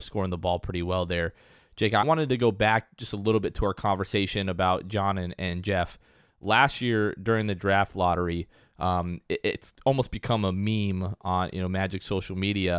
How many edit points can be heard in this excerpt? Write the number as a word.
one